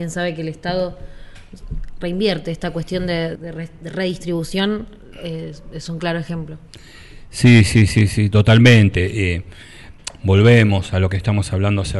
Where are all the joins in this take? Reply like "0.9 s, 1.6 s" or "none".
3.4 s